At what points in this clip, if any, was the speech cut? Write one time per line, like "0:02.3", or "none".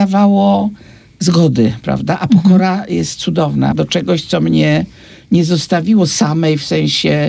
0:03.7